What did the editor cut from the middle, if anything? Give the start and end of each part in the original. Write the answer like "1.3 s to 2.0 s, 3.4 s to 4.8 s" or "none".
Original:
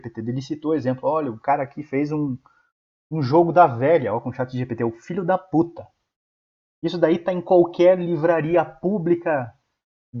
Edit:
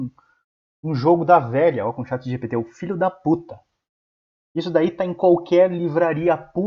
none